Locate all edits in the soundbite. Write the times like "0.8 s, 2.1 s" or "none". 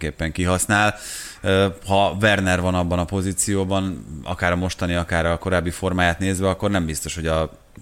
none

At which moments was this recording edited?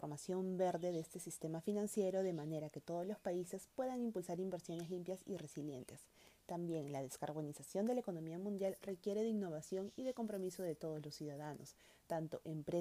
none

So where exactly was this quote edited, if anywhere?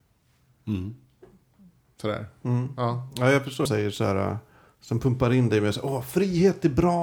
3.7 s

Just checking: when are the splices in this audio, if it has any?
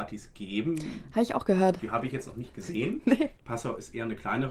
3.4 s

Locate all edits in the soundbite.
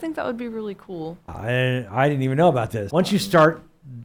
1.3 s, 2.9 s

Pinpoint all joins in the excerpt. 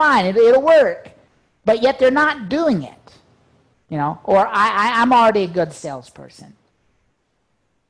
3.8 s

